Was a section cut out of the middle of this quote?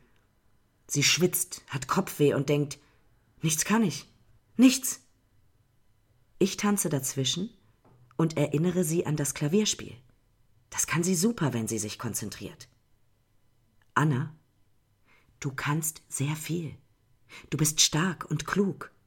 yes; 1 cut; at 4.4 s

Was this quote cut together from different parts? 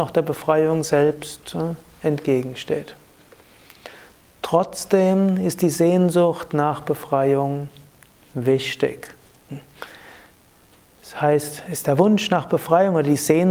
no; 0 cuts

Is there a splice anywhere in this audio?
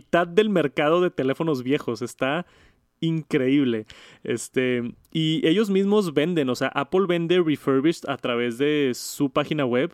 no; 0 cuts

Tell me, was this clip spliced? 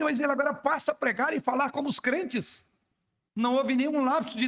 yes; 1 cut; at 3.3 s

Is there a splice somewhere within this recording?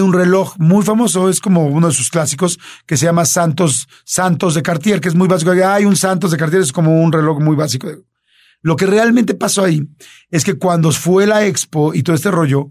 no; 0 cuts

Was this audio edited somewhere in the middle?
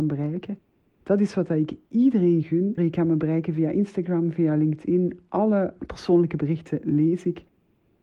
yes; 1 cut; at 2.8 s

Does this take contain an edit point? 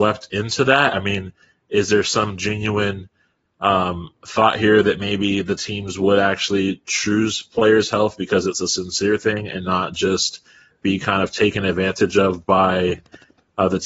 no; 0 cuts

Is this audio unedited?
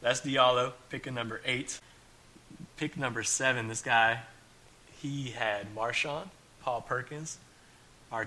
yes; 0 cuts

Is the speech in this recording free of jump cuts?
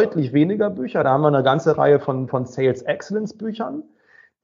yes; 0 cuts

